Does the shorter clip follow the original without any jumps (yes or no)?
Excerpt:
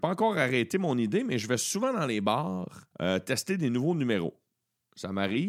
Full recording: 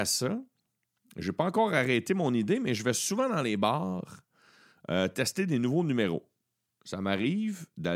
no